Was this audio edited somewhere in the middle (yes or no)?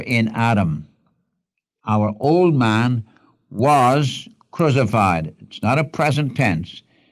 no